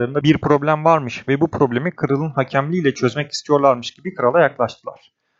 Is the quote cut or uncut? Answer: uncut